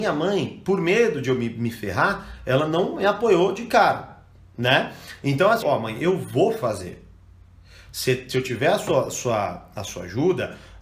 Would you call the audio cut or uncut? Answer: cut